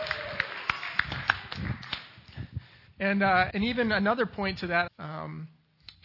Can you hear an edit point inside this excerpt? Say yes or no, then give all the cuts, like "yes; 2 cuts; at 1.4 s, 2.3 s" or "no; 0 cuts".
yes; 2 cuts; at 3.5 s, 4.9 s